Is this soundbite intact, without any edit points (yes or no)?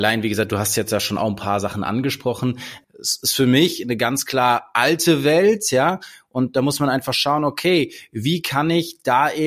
no